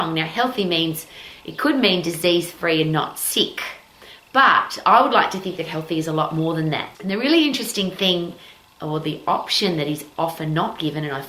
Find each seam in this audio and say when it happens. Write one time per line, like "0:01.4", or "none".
0:06.9